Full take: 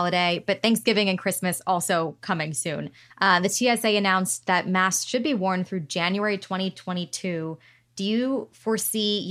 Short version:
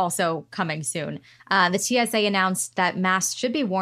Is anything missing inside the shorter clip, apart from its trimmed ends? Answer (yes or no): no